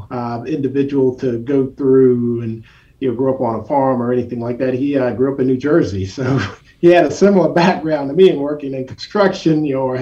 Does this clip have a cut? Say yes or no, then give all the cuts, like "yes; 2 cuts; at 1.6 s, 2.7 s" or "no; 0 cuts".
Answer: no; 0 cuts